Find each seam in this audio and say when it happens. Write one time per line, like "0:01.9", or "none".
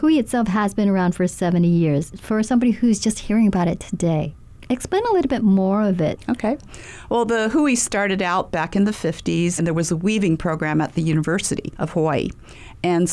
0:09.6